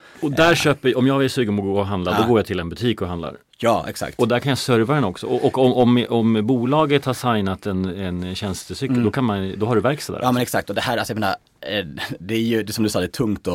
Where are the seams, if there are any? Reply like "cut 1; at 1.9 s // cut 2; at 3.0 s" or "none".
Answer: none